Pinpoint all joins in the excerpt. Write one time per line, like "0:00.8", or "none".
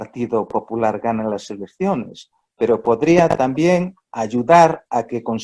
none